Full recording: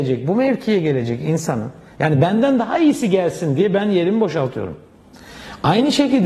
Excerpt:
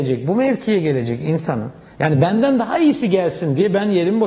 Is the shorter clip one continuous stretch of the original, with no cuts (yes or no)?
yes